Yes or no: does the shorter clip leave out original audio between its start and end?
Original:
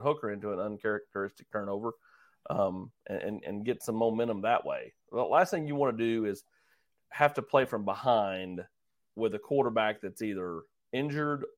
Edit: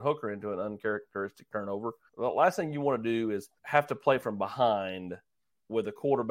yes